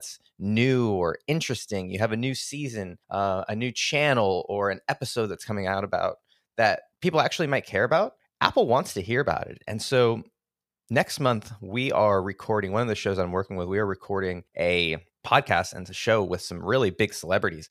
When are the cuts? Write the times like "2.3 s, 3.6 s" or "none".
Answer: none